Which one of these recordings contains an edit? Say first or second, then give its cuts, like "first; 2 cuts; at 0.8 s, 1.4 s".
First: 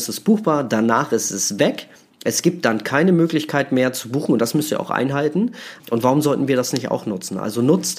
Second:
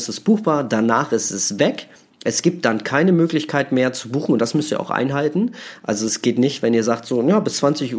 first; 1 cut; at 5.8 s